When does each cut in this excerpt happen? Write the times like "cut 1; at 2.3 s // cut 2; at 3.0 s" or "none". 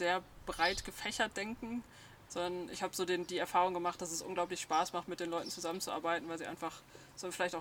cut 1; at 2.3 s